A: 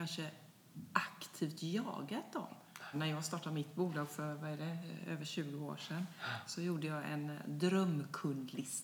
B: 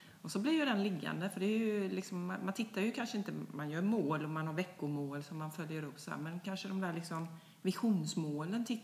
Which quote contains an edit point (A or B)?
A